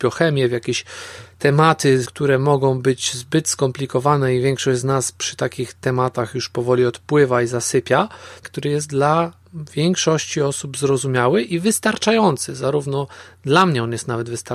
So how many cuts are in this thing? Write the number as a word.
two